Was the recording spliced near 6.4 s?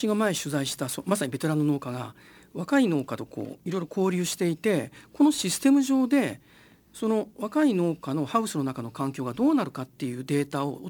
no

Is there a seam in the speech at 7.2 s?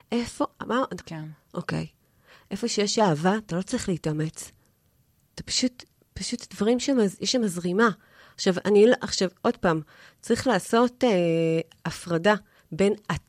no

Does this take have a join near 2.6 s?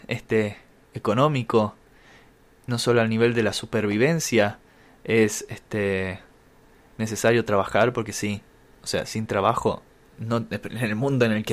no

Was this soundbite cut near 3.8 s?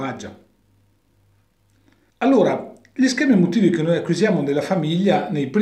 no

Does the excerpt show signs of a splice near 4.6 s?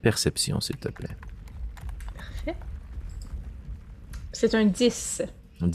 no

